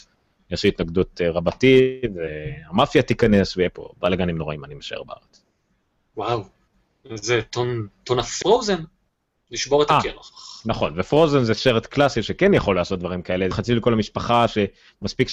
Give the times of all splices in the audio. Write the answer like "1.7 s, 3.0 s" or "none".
8.4 s, 13.5 s